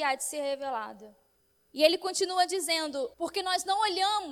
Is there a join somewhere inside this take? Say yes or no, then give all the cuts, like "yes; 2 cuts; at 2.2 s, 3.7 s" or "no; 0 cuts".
yes; 1 cut; at 3.1 s